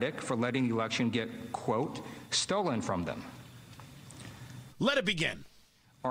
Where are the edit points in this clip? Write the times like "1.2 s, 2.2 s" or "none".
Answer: 4.7 s